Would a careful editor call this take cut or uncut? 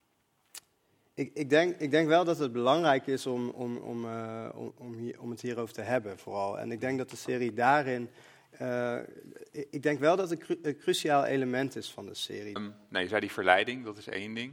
cut